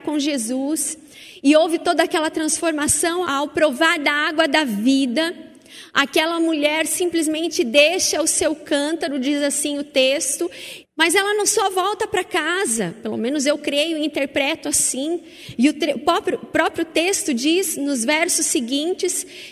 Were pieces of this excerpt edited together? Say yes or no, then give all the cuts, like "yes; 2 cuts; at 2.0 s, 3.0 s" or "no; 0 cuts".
yes; 2 cuts; at 3.2 s, 10.8 s